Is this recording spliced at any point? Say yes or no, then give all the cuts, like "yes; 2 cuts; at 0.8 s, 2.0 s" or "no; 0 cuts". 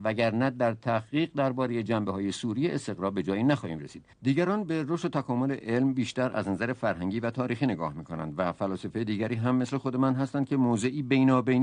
yes; 1 cut; at 4.1 s